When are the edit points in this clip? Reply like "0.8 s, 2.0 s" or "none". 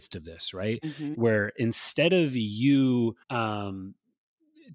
1.1 s, 3.2 s